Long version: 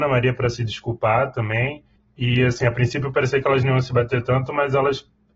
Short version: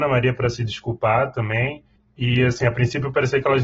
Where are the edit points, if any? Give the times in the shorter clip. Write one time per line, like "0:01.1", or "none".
none